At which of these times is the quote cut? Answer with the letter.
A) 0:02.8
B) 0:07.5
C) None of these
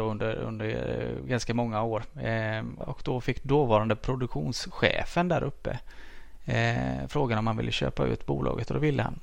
A